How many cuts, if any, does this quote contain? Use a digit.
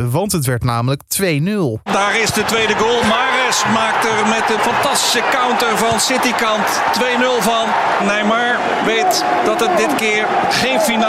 2